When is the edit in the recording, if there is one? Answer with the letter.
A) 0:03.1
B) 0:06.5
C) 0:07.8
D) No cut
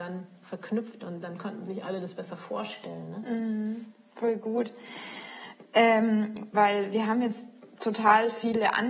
B